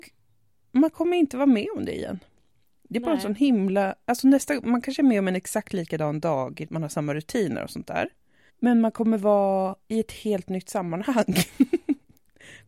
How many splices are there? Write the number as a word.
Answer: three